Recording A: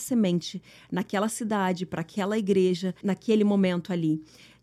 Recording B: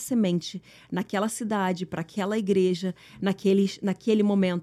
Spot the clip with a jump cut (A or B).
A